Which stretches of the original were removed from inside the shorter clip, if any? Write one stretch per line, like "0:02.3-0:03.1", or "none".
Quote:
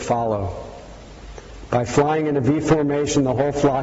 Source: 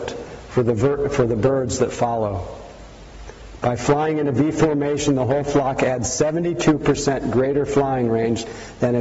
none